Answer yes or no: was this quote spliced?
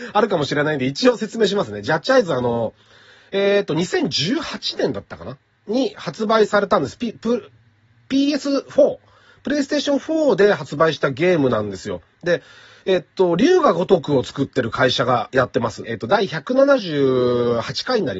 yes